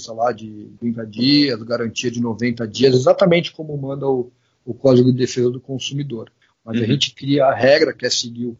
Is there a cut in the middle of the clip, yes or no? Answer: yes